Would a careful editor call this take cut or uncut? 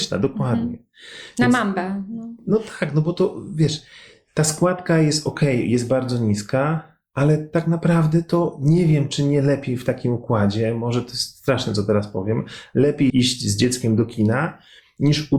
cut